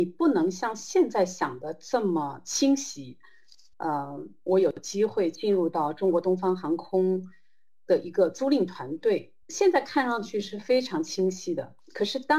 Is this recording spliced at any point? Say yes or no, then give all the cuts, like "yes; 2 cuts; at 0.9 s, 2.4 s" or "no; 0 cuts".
yes; 2 cuts; at 3.7 s, 9.4 s